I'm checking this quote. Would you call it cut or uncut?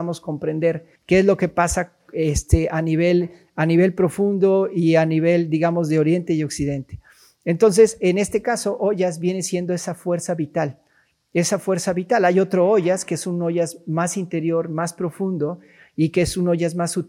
cut